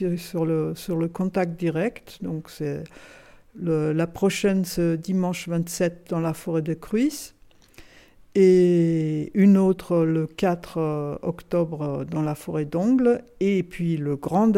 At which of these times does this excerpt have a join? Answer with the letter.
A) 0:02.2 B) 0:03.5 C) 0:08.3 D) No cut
A